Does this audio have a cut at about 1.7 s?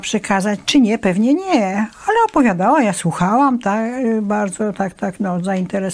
no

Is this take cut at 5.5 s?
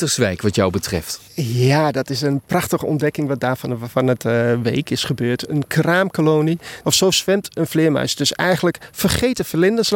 no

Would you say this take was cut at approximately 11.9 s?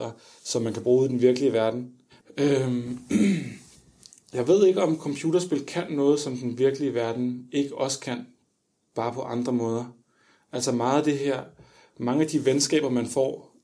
no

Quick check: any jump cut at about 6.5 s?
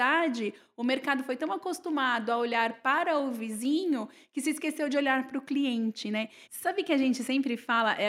yes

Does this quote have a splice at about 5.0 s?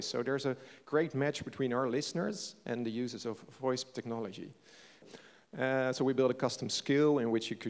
yes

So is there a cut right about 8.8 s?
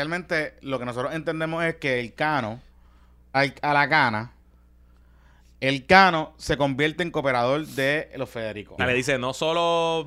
yes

